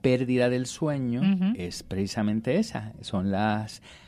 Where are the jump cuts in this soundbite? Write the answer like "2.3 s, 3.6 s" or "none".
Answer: none